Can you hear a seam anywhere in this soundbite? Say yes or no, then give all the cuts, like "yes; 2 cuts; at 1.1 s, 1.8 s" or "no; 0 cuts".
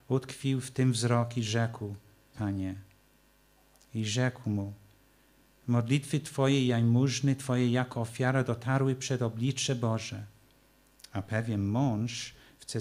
yes; 2 cuts; at 2.3 s, 11.0 s